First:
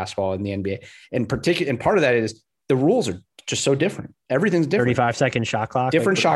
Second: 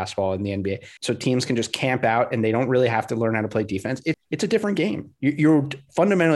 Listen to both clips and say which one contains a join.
second; 2 cuts; at 1.0 s, 4.1 s

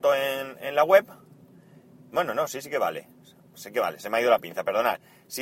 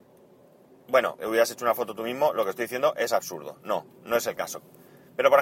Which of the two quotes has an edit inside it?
second; 1 cut; at 1.2 s

